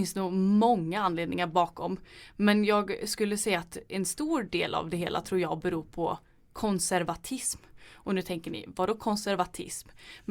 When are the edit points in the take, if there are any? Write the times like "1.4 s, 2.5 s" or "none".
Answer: none